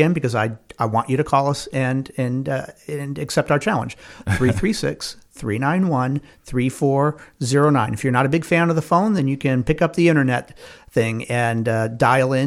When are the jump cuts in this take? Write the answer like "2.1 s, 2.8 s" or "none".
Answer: none